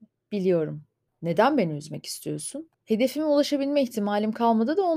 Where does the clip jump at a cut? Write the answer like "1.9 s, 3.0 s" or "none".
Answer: 1.1 s, 2.7 s